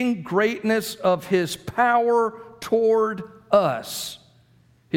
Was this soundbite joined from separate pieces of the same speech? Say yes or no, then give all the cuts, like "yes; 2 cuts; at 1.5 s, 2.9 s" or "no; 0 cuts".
no; 0 cuts